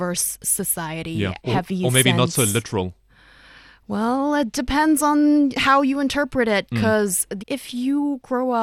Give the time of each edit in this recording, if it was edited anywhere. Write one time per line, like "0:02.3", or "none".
0:01.4
0:07.4